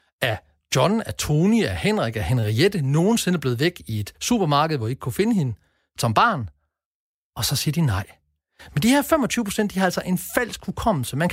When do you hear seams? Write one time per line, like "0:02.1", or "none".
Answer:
none

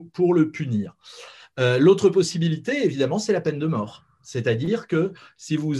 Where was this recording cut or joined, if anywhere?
none

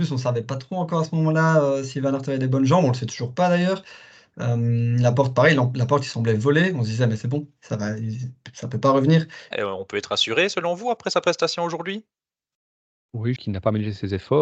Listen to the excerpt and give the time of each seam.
0:09.5
0:13.4

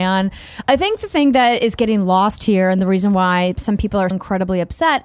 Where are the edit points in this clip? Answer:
0:04.1

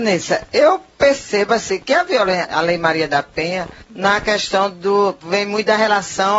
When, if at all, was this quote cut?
0:02.4
0:05.2

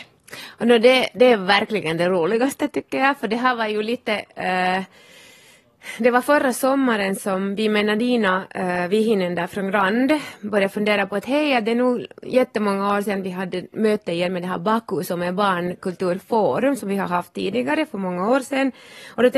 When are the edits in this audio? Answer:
none

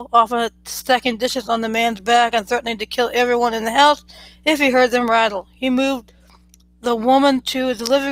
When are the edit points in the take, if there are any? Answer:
none

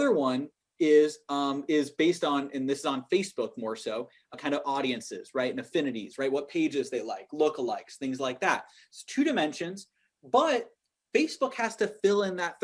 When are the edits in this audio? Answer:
0:04.3

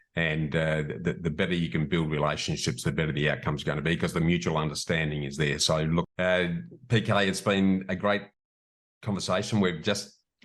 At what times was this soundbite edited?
0:06.1

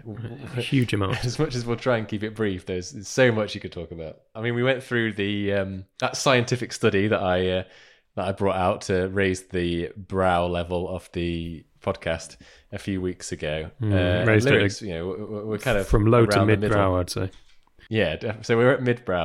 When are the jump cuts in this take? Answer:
none

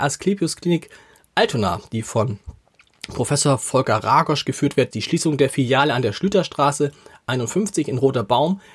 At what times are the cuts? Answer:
0:04.9

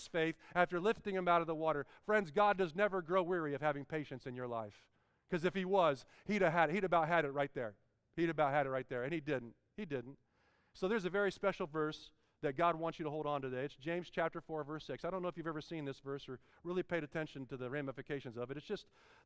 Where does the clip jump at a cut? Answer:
none

